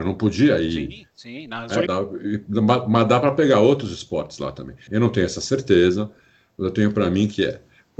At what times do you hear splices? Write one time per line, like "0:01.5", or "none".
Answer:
0:01.9
0:04.9

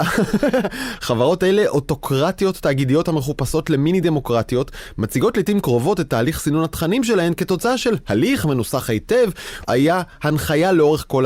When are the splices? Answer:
0:09.6

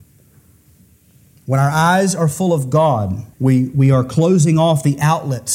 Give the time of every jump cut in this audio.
0:03.3

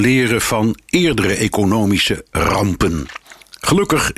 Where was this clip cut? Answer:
none

